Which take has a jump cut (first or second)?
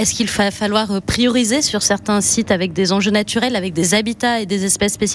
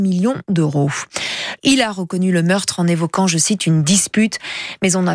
second